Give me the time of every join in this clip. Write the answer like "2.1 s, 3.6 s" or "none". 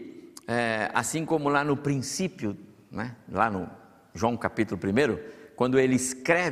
none